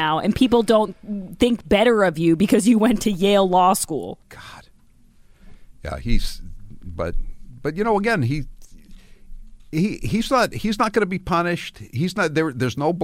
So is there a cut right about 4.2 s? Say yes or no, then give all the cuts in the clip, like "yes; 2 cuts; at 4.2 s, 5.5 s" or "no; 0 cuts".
yes; 1 cut; at 4.2 s